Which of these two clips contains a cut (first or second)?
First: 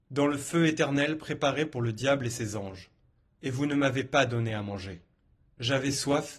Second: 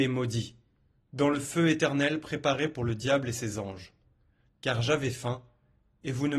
first